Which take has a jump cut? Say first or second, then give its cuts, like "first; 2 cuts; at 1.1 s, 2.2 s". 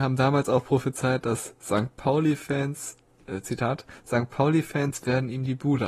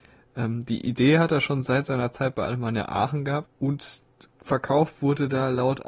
second; 1 cut; at 3.5 s